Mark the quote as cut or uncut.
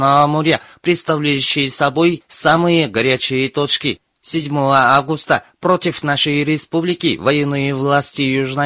cut